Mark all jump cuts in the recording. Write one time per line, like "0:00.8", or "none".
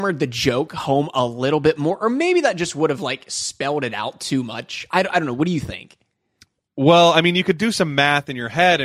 none